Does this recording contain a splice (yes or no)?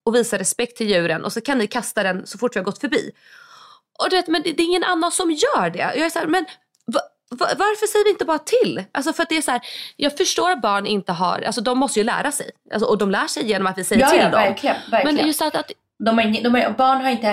no